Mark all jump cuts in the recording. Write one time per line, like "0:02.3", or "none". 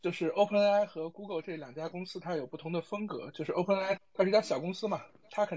0:04.0